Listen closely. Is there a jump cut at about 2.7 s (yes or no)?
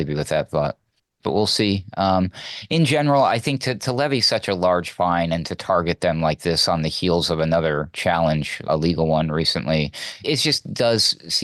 no